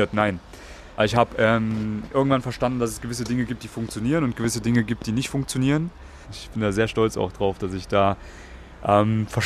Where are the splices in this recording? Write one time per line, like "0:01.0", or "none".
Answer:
0:01.0
0:06.2